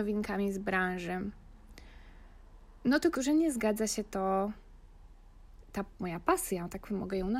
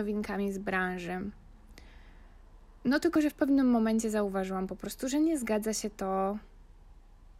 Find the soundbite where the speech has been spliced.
first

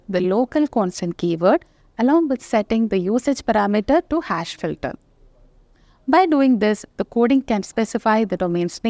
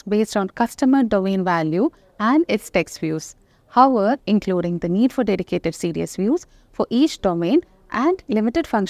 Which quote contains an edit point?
second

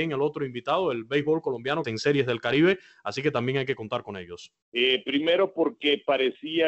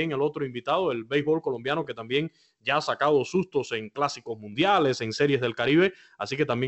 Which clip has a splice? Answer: first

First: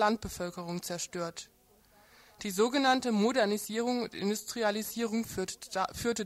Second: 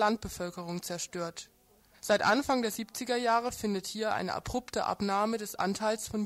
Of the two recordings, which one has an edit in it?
second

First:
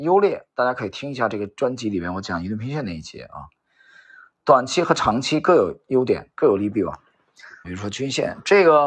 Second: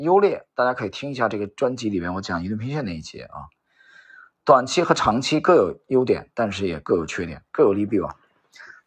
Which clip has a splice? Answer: first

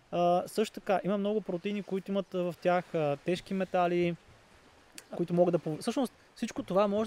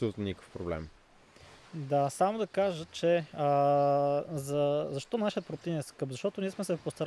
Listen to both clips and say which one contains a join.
first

